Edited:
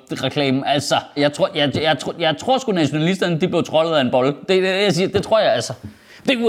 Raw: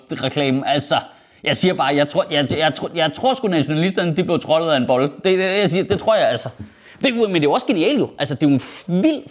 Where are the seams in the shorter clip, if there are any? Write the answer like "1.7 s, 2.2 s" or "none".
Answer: 1.2 s